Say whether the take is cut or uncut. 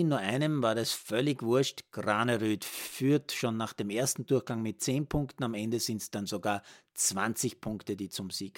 uncut